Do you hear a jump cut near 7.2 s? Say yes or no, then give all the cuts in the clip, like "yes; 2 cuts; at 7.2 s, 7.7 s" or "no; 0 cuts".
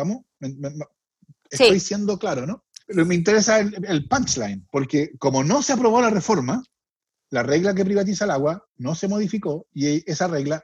no; 1 cut; at 2.8 s